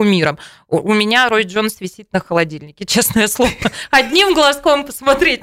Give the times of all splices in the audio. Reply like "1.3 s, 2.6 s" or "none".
none